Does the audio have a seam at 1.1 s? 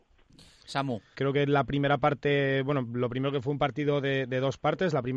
yes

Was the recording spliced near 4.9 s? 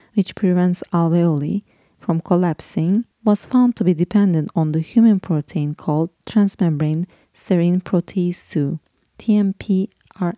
no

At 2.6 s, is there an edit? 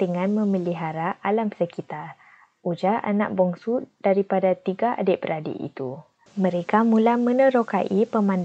no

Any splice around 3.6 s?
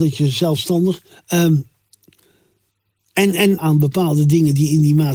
yes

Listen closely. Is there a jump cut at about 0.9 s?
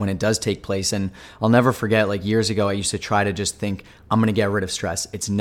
no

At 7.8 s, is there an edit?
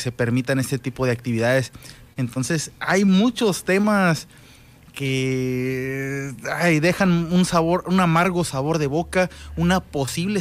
no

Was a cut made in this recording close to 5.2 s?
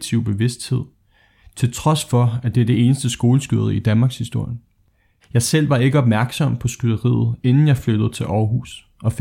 yes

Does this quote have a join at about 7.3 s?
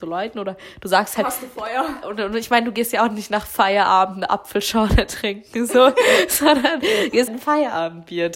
yes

